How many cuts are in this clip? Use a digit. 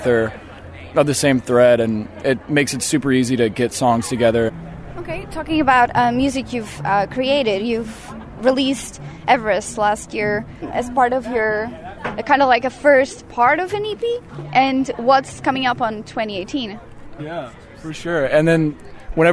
1